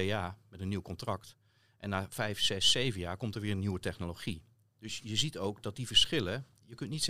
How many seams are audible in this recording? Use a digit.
0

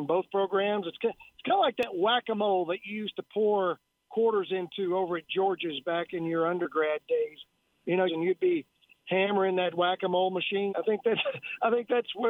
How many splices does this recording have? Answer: 2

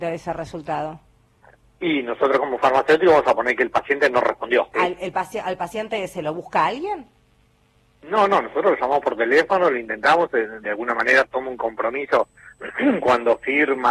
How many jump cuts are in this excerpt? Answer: 1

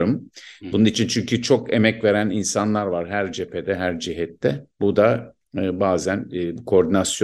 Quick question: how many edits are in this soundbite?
1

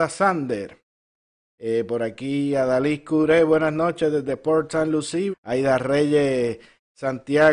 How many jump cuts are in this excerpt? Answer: 2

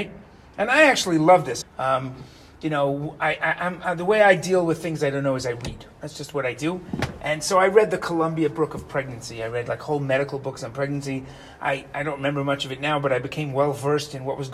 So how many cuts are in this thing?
1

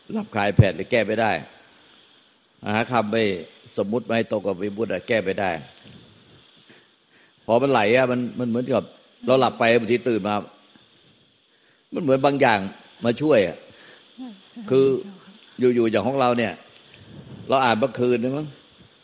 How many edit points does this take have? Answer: 0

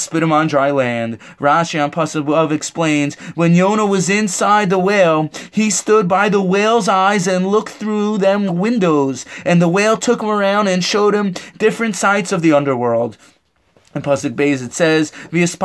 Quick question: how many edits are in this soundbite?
1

